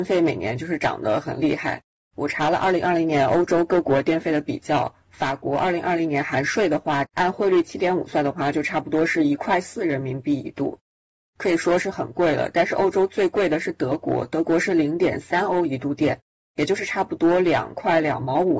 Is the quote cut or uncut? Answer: cut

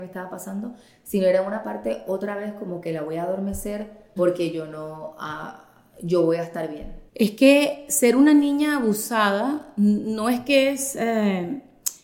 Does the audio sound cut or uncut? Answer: cut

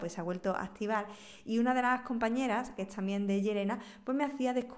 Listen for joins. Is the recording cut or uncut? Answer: cut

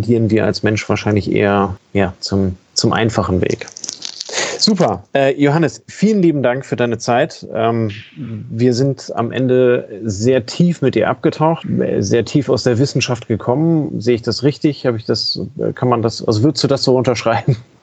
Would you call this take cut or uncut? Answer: cut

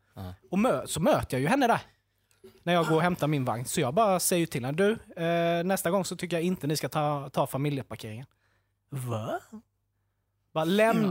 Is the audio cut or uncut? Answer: uncut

